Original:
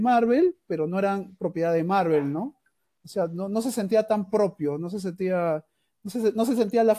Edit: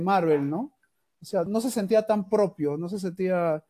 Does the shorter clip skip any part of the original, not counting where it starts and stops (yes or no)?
yes